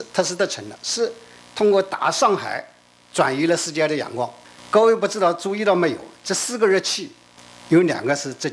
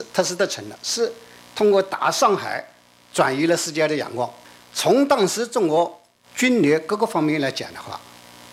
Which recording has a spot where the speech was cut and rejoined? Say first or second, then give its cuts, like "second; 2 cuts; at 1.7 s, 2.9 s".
first; 1 cut; at 4.6 s